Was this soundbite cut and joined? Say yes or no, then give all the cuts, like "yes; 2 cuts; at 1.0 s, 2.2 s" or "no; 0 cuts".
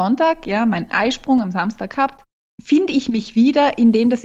yes; 1 cut; at 2.5 s